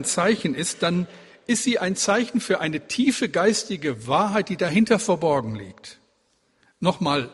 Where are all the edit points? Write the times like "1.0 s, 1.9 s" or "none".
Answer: none